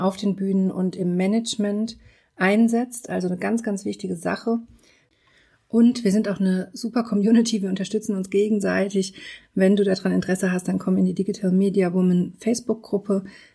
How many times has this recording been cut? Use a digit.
0